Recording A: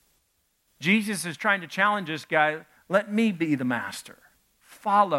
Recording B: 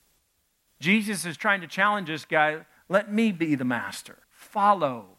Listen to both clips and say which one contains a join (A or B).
B